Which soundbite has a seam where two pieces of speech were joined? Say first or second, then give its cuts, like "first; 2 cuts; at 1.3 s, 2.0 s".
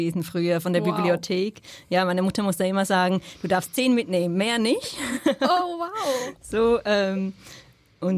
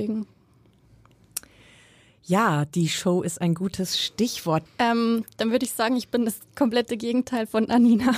second; 1 cut; at 4.7 s